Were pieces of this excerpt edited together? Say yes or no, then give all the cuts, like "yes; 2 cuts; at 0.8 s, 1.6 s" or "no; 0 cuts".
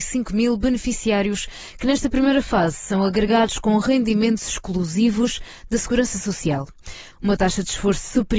yes; 1 cut; at 7.1 s